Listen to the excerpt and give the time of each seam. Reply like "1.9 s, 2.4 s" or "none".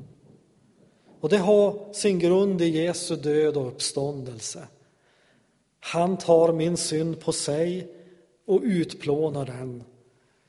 none